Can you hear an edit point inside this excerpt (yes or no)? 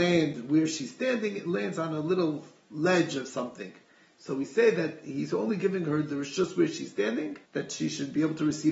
yes